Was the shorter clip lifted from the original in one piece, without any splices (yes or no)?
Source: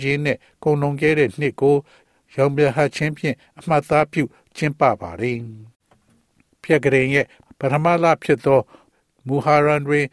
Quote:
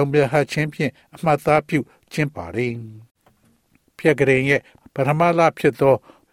no